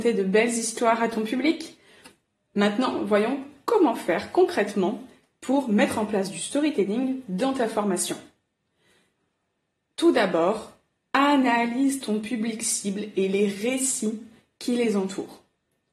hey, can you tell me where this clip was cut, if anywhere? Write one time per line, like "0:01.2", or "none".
none